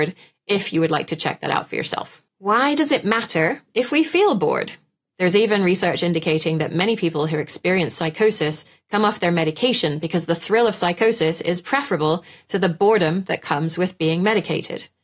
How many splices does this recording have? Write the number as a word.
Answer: one